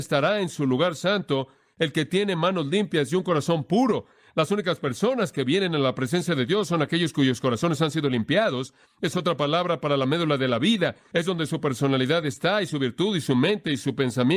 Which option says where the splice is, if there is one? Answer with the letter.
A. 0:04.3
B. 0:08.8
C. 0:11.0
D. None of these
B